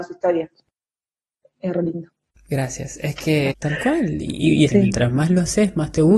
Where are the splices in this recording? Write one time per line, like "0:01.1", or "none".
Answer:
0:03.5
0:04.7